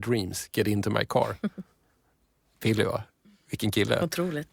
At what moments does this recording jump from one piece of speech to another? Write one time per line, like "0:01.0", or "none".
none